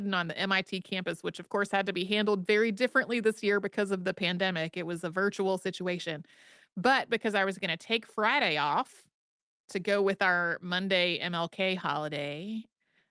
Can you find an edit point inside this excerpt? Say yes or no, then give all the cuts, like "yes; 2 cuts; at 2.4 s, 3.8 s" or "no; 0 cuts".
no; 0 cuts